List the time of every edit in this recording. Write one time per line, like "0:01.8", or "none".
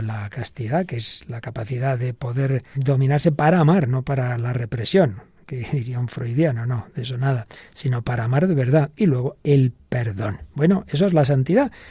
0:02.7